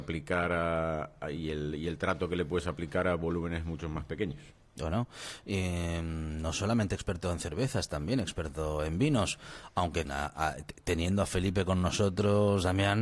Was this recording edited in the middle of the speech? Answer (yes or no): yes